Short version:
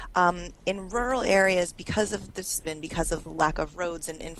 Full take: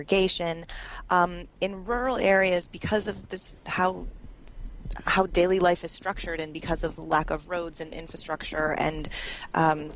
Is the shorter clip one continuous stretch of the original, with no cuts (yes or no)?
no